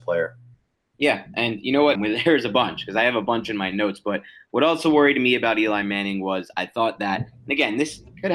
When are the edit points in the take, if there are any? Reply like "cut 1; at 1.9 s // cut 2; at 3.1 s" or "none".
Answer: cut 1; at 1.9 s